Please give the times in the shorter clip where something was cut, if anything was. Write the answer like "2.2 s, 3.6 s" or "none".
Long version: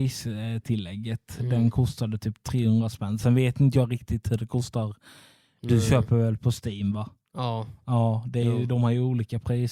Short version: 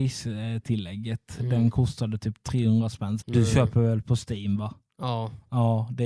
3.2 s